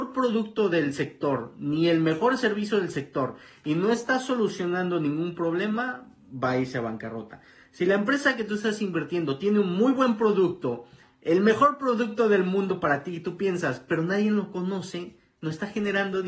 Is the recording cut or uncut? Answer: uncut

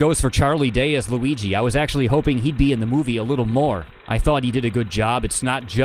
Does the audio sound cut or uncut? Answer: uncut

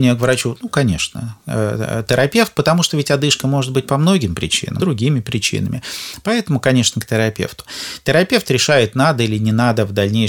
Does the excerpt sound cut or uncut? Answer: cut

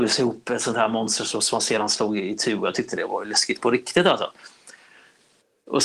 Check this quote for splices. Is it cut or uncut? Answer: uncut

